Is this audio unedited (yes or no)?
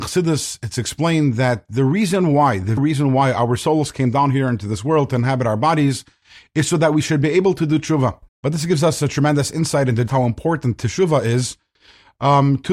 no